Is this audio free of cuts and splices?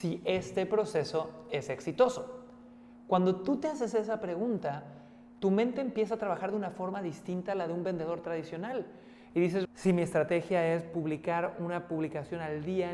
no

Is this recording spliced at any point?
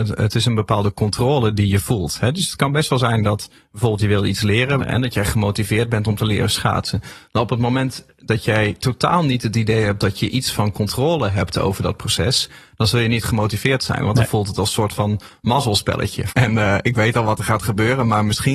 yes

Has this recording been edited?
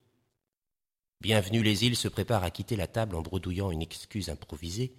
no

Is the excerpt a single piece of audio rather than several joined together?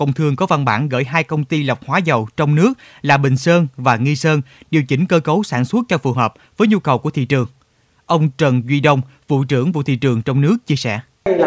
yes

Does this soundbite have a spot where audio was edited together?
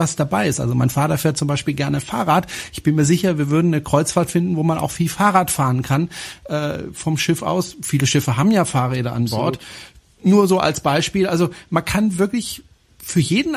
no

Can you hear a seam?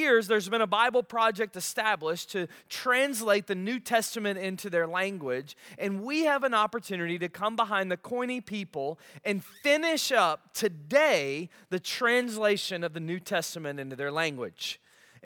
no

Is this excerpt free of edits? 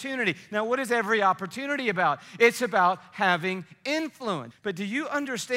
no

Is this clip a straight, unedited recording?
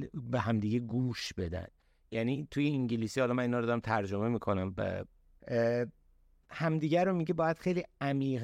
no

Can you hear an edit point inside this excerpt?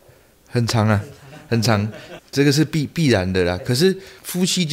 yes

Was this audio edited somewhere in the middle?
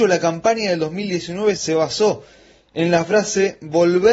yes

